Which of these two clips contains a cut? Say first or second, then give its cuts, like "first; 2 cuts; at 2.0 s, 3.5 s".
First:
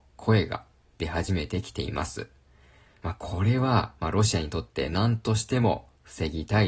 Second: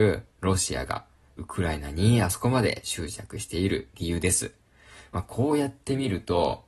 first; 1 cut; at 2.9 s